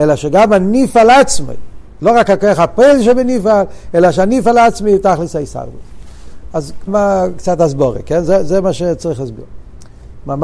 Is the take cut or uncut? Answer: cut